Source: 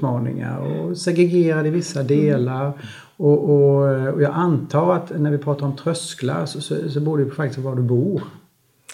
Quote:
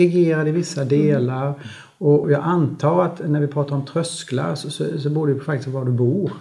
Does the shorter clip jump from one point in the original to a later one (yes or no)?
yes